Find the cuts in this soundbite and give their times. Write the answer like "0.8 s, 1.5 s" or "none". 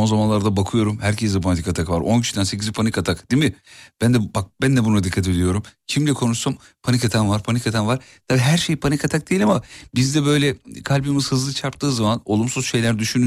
none